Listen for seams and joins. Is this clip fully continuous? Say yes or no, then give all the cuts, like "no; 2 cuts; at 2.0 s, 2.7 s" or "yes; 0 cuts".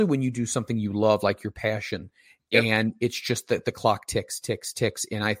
yes; 0 cuts